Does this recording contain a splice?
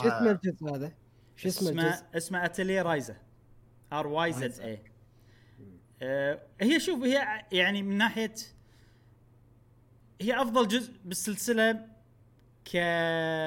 no; 0 cuts

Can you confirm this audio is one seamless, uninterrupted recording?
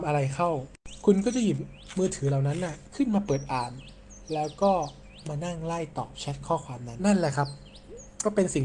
no; 1 cut; at 7.0 s

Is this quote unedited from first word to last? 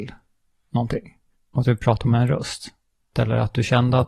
no; 1 cut; at 3.1 s

